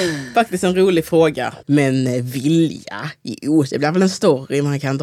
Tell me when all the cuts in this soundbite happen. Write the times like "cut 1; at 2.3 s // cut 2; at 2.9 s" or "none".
cut 1; at 1.6 s